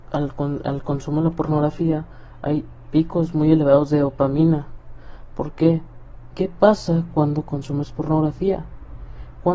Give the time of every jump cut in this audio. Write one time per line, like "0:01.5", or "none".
0:06.3